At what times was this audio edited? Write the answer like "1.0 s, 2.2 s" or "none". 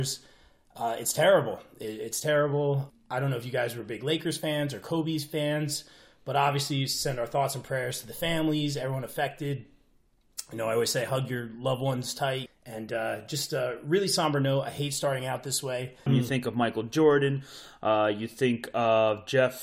12.5 s, 16.1 s